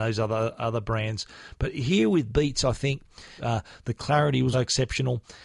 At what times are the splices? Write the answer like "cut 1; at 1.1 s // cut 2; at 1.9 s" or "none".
cut 1; at 3.4 s // cut 2; at 4.5 s